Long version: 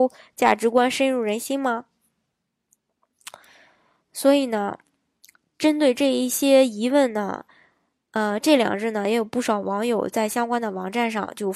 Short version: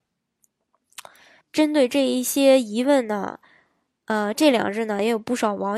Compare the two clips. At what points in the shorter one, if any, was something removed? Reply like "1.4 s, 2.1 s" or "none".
1.4 s